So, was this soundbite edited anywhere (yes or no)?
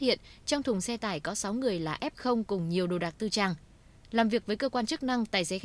no